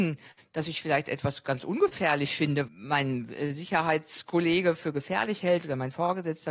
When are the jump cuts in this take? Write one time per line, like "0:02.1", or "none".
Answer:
0:02.7